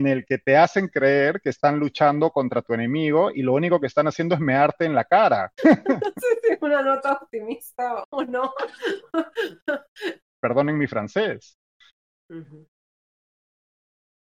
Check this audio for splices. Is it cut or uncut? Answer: cut